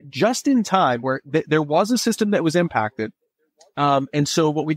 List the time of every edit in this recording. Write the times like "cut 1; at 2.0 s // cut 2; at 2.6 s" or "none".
none